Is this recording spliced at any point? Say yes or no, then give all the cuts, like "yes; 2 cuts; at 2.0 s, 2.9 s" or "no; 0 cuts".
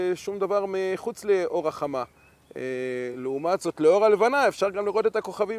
no; 0 cuts